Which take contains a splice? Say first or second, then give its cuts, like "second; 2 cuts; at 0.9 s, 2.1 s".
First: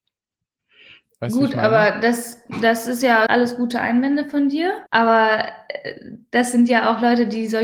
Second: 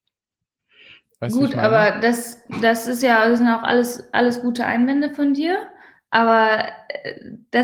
first; 2 cuts; at 3.3 s, 4.9 s